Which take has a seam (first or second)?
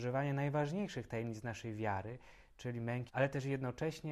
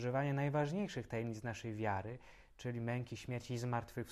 first